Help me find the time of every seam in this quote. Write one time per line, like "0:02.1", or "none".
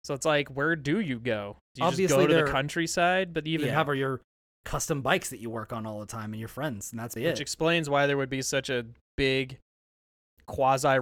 0:03.7
0:07.2